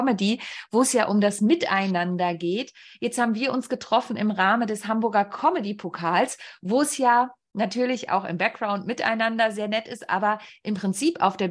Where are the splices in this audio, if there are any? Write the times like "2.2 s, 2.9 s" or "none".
none